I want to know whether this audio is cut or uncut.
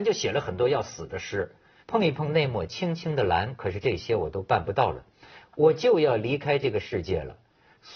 cut